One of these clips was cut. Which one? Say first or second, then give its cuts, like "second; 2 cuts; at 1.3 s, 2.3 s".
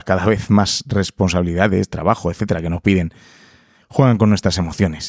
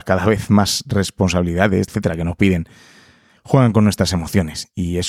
second; 1 cut; at 1.9 s